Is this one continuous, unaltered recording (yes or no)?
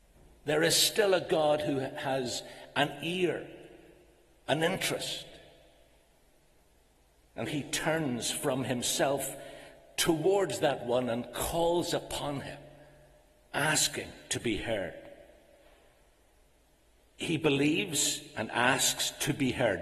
no